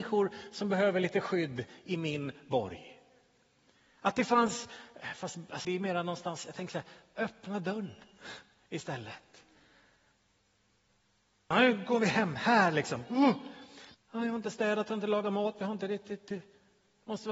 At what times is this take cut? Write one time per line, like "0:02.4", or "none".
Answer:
0:05.6
0:11.5
0:13.9